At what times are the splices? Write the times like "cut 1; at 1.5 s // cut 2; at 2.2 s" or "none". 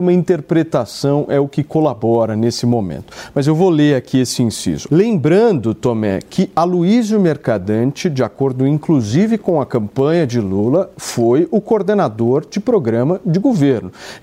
cut 1; at 4.9 s